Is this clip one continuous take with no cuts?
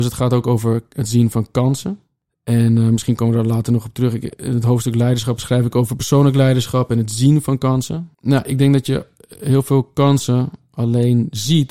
no; 1 cut; at 8.1 s

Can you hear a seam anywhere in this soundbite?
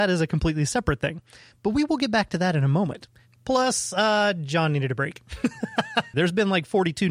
yes; 2 cuts; at 1.5 s, 6.1 s

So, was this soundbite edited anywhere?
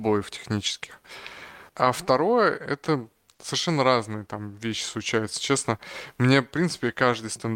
no; 0 cuts

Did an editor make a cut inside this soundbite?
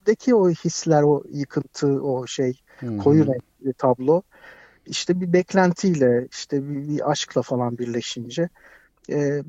no; 0 cuts

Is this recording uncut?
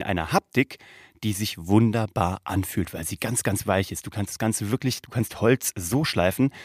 yes; 0 cuts

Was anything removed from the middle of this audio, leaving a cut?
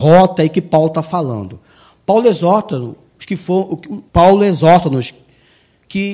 yes; 1 cut; at 4.1 s

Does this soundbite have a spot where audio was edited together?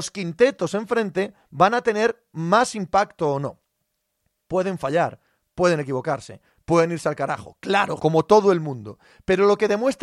yes; 1 cut; at 8.0 s

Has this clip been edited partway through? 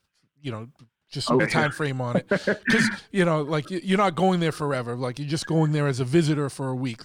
yes; 1 cut; at 1.4 s

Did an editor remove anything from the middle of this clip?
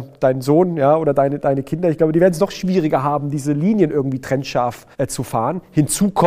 yes; 1 cut; at 4.9 s

